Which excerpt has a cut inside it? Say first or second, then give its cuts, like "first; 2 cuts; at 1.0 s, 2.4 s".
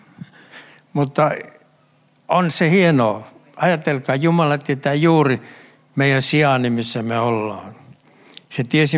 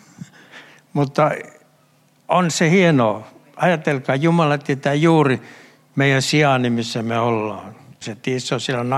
second; 1 cut; at 8.0 s